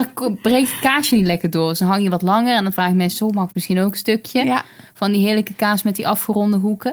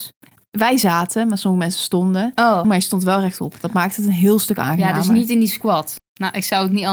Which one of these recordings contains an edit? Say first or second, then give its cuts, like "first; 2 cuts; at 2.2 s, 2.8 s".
second; 2 cuts; at 2.6 s, 6.0 s